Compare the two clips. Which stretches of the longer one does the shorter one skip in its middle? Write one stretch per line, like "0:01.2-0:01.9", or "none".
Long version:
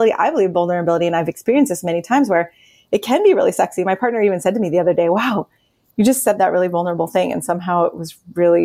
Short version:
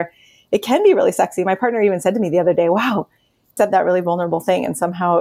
0:06.0-0:06.2